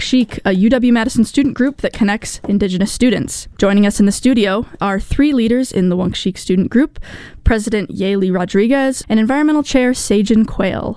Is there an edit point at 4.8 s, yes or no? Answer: yes